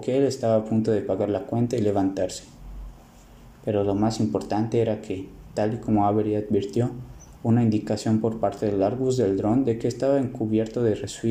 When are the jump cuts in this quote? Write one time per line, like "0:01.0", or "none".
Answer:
0:07.4